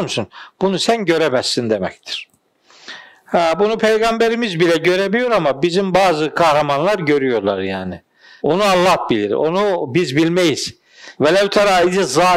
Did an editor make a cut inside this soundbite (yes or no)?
yes